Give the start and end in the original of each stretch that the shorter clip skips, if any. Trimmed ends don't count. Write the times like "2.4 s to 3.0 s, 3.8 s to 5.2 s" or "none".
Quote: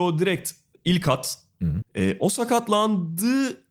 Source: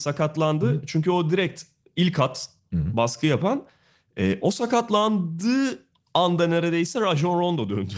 2.9 s to 4.0 s